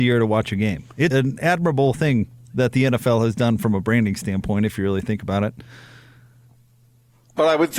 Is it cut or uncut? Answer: cut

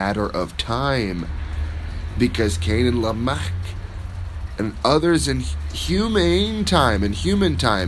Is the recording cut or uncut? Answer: uncut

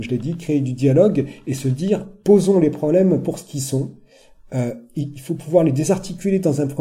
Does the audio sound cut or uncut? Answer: cut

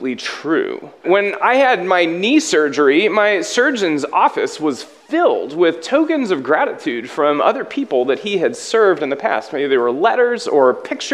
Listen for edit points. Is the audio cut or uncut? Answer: cut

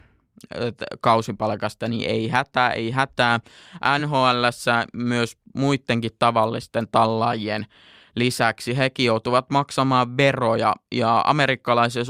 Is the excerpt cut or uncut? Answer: uncut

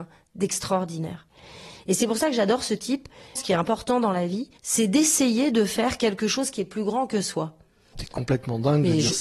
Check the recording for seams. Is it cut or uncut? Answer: cut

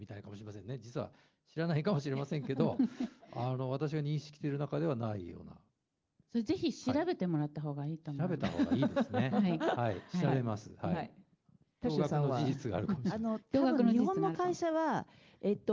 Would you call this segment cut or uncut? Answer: uncut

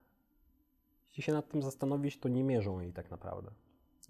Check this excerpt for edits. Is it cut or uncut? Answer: cut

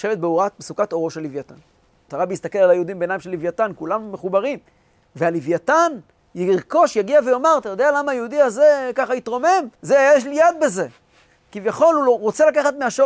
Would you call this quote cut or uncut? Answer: cut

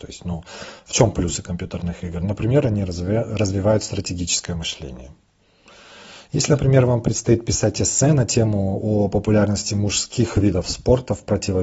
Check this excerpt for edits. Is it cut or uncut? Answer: cut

